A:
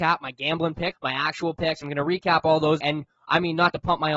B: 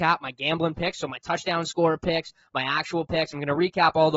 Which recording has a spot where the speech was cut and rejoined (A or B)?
A